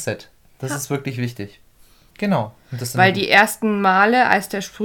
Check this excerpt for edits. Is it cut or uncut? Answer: cut